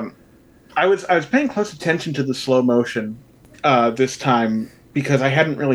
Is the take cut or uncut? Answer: uncut